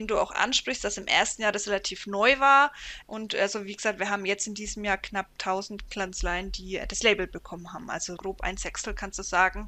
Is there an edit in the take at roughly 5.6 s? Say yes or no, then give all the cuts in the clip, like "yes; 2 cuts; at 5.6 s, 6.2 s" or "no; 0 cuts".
no; 2 cuts; at 3.0 s, 8.2 s